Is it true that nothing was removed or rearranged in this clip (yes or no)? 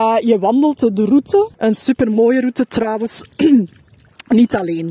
no